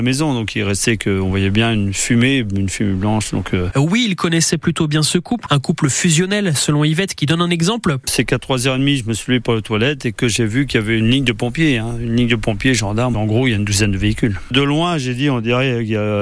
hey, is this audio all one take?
no; 3 cuts; at 3.7 s, 5.5 s, 8.0 s

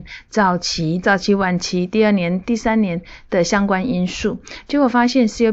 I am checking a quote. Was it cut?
yes; 1 cut; at 1.0 s

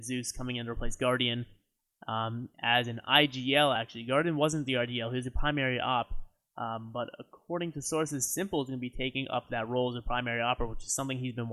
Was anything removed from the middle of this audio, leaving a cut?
no; 0 cuts

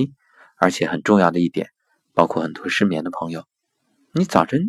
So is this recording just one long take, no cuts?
yes; 0 cuts

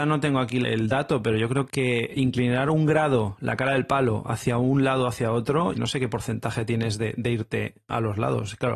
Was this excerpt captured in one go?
no; 1 cut; at 5.7 s

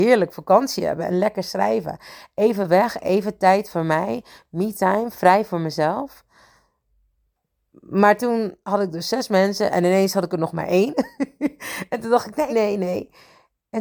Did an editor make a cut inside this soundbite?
yes; 1 cut; at 12.5 s

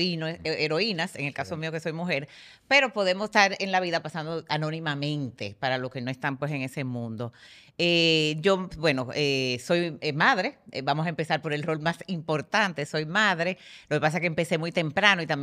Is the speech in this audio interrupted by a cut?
no; 0 cuts

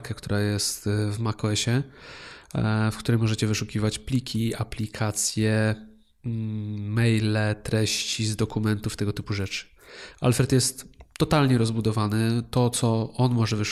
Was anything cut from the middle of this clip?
no; 0 cuts

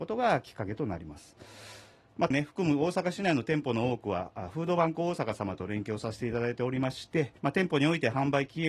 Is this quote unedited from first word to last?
no; 2 cuts; at 2.3 s, 7.4 s

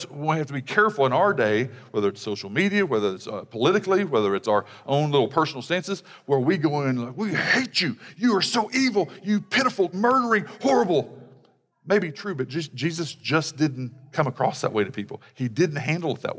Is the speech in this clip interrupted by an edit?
yes; 1 cut; at 9.9 s

